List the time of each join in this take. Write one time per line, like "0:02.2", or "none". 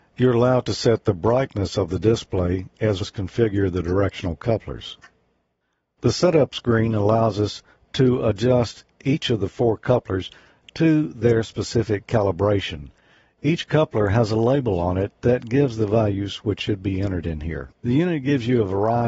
0:03.0